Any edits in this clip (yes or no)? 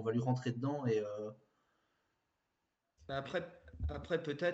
no